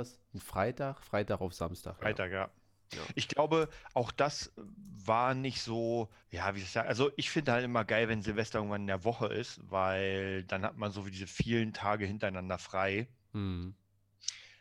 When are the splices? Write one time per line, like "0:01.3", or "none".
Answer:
0:06.2